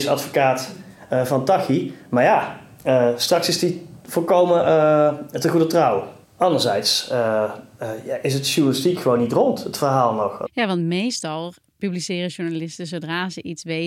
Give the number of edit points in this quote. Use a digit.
2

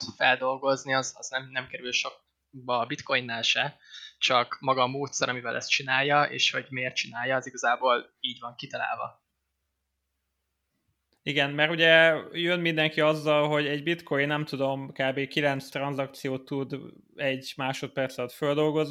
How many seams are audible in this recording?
0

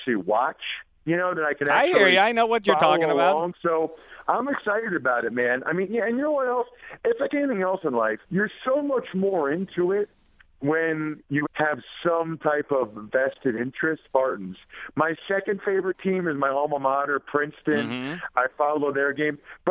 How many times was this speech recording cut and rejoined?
3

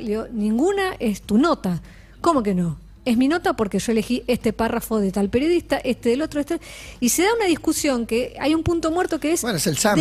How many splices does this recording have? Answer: 0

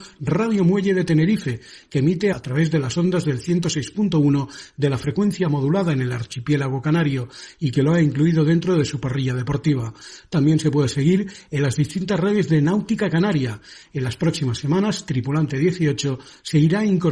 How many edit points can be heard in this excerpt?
1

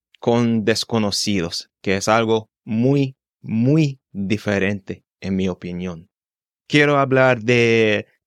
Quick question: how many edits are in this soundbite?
0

